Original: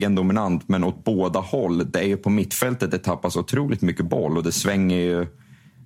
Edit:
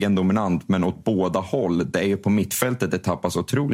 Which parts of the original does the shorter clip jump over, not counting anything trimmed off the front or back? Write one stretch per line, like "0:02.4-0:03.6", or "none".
none

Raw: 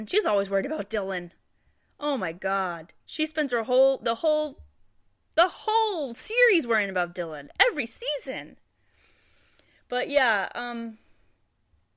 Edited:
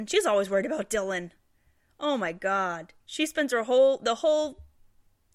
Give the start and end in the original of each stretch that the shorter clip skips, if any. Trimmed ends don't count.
none

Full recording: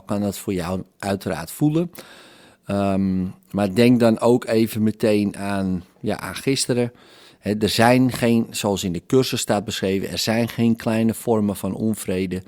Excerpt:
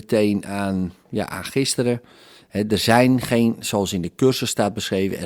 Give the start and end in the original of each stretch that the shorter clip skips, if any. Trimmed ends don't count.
none

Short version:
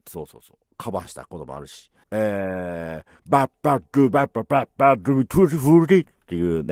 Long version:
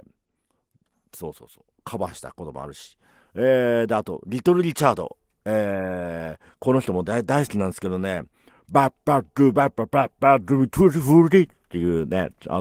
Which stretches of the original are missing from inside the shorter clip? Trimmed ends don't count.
0:03.1-0:05.4
0:06.5-0:08.6

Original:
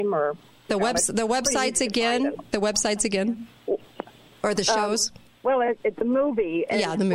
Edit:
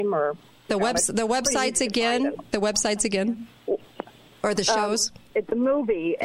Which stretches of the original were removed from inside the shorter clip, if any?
0:05.3-0:05.8

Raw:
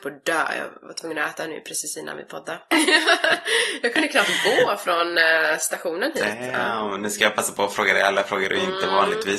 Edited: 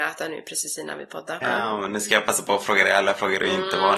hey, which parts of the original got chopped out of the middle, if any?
0:02.6-0:06.5

